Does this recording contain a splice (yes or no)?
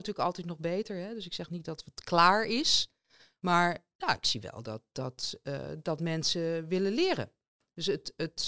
no